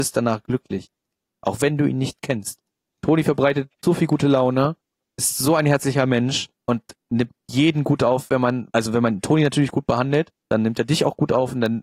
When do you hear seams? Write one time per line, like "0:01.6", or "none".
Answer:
0:06.5
0:08.7
0:10.4